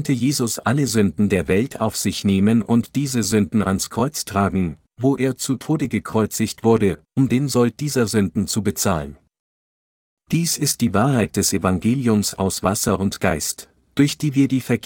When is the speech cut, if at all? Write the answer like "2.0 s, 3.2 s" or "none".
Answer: none